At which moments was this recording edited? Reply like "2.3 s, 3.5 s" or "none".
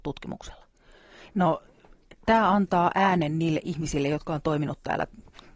1.3 s